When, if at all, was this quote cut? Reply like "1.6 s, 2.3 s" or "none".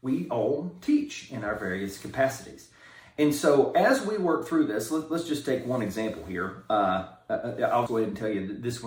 7.9 s